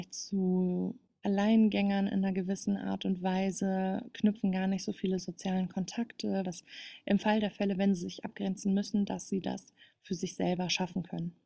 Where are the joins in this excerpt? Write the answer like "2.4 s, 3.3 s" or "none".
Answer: 6.4 s